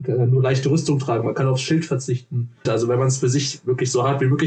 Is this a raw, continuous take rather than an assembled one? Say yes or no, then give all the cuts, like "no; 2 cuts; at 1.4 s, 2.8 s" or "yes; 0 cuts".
no; 1 cut; at 2.6 s